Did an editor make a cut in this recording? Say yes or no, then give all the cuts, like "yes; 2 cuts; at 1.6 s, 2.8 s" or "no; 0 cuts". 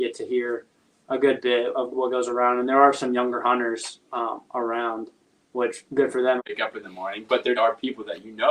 yes; 2 cuts; at 6.4 s, 7.6 s